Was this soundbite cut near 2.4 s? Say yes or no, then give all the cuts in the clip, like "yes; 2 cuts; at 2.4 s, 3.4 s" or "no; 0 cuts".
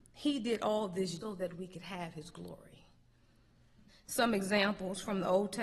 no; 2 cuts; at 1.2 s, 3.9 s